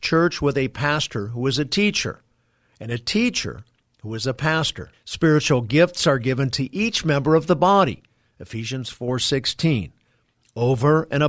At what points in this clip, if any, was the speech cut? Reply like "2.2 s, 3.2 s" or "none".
4.9 s